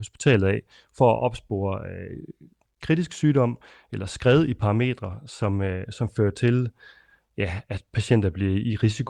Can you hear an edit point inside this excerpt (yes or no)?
no